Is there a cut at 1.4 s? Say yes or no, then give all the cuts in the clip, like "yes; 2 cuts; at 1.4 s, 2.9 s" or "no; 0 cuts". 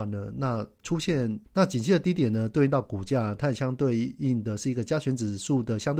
yes; 1 cut; at 1.4 s